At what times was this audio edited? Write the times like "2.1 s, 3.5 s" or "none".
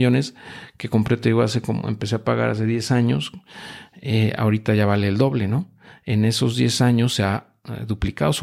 none